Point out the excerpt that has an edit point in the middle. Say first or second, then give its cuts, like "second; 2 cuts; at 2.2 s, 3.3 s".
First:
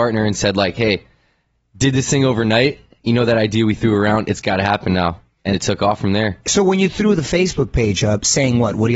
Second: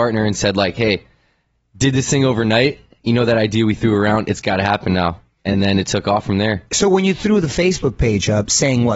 first; 1 cut; at 5.5 s